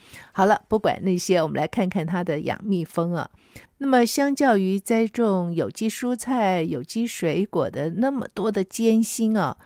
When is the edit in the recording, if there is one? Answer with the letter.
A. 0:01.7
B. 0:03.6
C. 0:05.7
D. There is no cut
B